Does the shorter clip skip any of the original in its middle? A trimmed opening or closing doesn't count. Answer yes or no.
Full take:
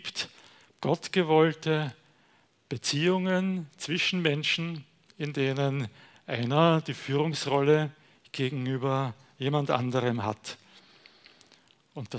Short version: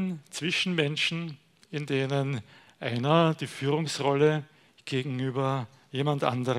no